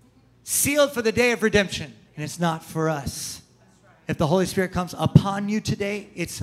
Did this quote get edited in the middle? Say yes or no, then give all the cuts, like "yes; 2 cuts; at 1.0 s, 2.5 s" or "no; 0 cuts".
yes; 1 cut; at 2.1 s